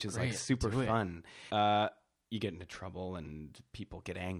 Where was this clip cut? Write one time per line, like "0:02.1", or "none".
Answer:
0:01.5